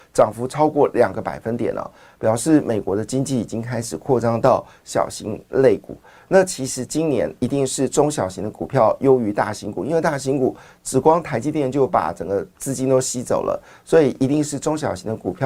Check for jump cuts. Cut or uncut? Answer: uncut